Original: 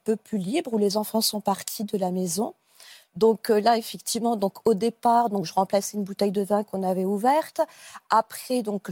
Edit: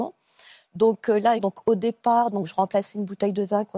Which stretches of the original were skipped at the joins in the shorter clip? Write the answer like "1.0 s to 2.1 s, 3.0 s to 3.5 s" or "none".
3.8 s to 4.4 s

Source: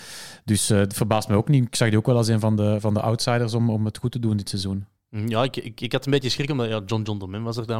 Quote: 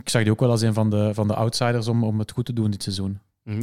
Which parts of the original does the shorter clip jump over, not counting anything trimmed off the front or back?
none

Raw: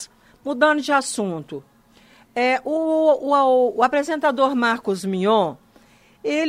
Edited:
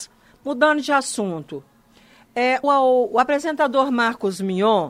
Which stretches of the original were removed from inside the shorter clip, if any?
2.6 s to 3.3 s

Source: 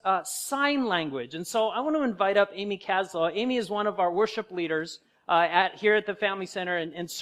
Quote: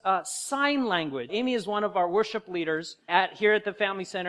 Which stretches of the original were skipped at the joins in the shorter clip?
1.3 s to 3.3 s, 5.1 s to 5.5 s

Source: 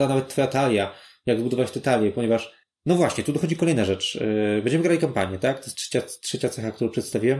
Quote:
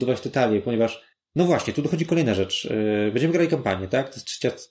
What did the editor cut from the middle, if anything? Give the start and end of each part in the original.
none

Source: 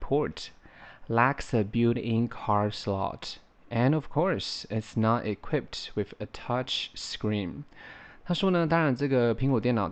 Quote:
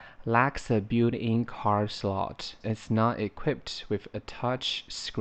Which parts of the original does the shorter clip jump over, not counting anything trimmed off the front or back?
3.4 s to 4.7 s

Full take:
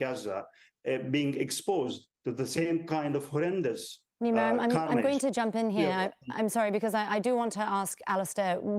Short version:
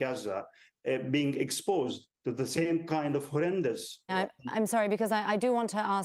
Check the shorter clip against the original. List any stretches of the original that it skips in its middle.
4.1 s to 5.9 s

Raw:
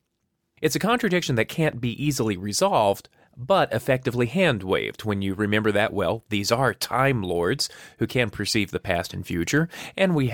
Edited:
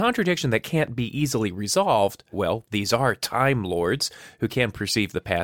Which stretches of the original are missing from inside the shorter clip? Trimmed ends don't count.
3.2 s to 5.9 s

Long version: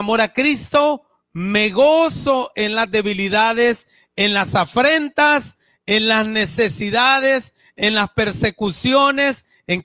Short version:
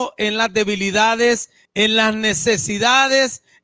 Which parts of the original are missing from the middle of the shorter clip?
4.0 s to 5.8 s

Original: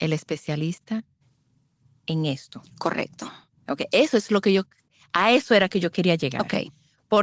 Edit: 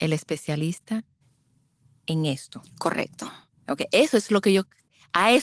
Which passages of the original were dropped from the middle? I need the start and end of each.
none

